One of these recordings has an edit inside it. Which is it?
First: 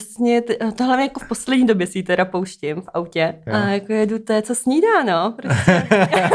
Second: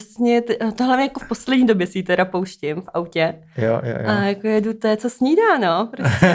first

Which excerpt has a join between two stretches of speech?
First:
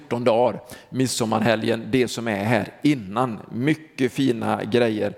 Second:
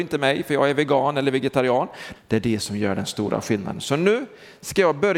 second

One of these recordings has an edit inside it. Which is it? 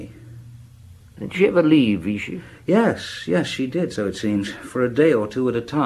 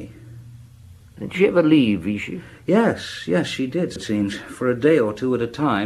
second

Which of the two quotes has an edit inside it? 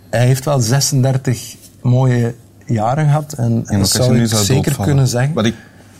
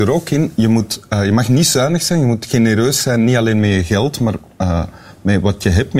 first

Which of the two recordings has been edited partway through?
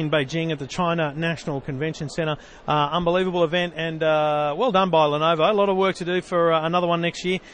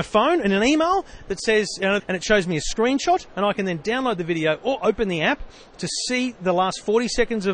second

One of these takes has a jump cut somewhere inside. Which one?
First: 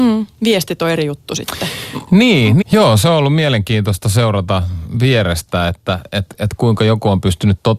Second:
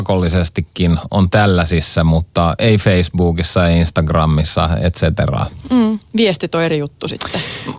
first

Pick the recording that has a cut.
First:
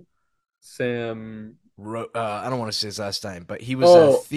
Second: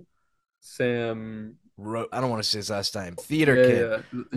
second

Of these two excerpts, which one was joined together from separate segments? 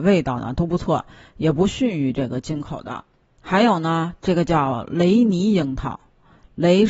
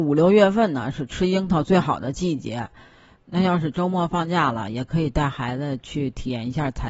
first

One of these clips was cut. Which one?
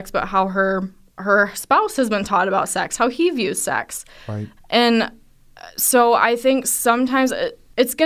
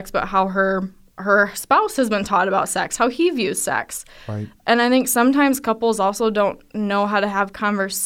first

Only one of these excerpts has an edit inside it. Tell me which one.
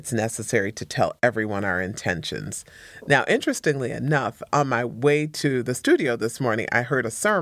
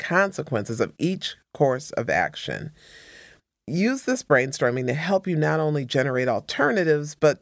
first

